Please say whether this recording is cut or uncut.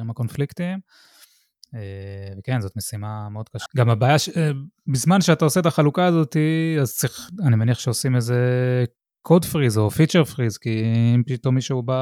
cut